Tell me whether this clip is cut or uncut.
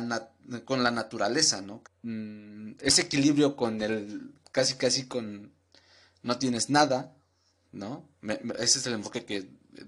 cut